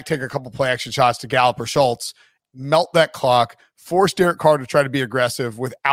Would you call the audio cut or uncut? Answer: uncut